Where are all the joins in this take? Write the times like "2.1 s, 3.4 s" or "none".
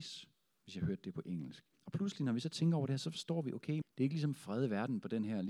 1.7 s, 3.8 s